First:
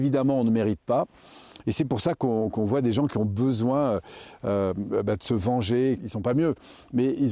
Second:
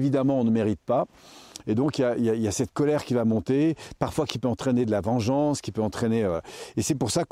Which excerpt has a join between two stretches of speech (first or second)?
first